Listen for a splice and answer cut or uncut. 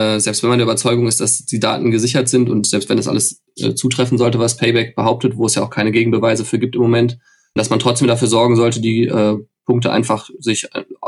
uncut